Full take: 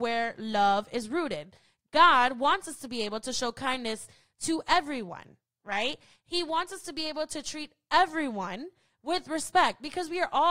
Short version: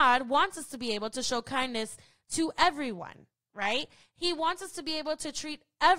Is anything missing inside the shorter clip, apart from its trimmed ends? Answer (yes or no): no